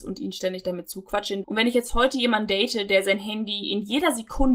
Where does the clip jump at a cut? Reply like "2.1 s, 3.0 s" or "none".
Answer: 1.4 s